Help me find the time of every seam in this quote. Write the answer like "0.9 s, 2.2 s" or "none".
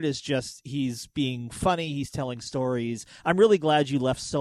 none